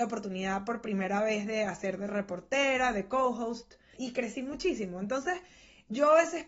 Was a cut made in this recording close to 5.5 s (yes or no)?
no